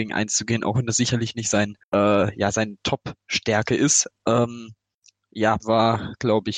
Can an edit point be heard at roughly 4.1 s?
yes; 3 cuts; at 1.8 s, 4.1 s, 5.6 s

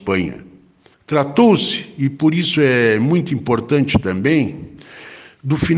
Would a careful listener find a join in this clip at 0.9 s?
yes; 1 cut; at 0.9 s

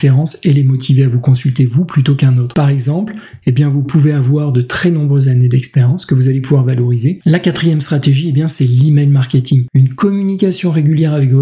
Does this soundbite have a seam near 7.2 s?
yes; 1 cut; at 7.2 s

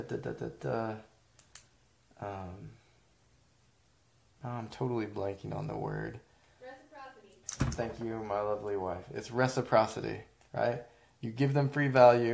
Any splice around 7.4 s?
yes; 1 cut; at 7.4 s

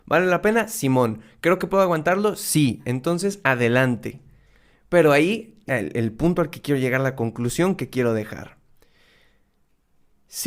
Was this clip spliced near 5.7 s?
yes; 1 cut; at 5.7 s

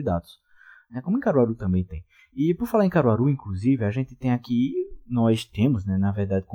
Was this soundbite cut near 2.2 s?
no; 0 cuts

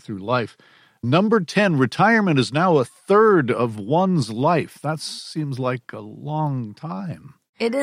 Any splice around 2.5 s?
no; 0 cuts

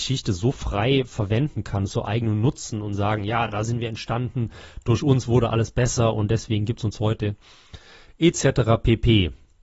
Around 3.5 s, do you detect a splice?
no; 0 cuts

